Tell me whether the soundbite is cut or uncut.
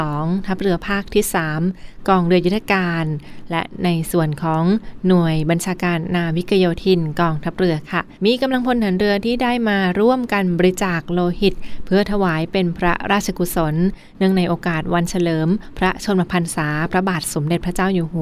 cut